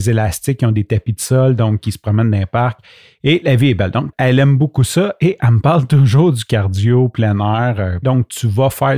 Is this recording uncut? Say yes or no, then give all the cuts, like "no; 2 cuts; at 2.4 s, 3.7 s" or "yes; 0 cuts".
no; 2 cuts; at 4.1 s, 8.0 s